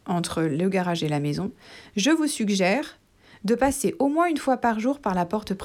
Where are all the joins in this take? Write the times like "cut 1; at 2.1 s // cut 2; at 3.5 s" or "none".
none